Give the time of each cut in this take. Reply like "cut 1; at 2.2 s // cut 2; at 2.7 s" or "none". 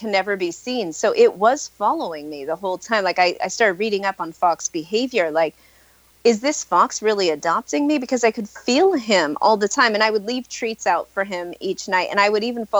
none